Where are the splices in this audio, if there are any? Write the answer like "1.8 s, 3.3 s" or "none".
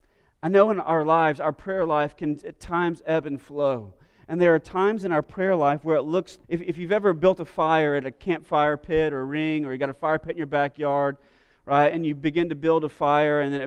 6.4 s